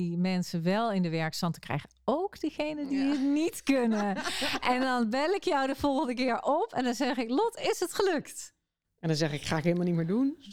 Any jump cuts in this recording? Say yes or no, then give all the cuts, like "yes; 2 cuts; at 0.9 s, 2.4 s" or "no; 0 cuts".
no; 0 cuts